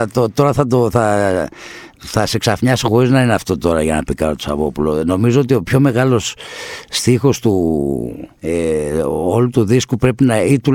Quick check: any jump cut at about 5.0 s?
no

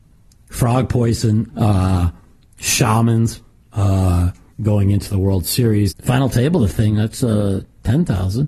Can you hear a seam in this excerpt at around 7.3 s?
no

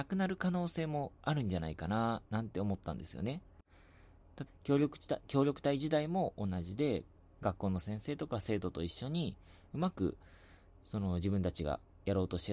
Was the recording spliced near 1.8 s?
no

